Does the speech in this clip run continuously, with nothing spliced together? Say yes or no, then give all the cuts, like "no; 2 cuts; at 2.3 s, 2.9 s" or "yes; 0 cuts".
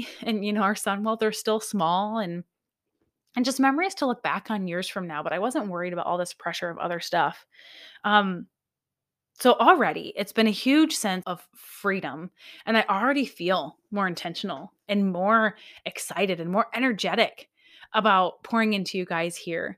no; 1 cut; at 11.2 s